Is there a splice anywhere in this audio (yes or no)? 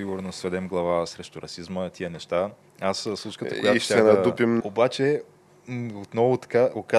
yes